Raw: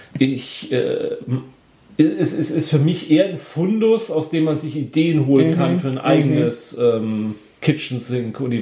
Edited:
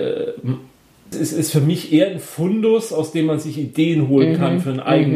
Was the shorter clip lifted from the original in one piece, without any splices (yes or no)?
no